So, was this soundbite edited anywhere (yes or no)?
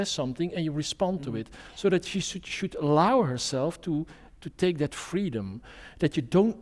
no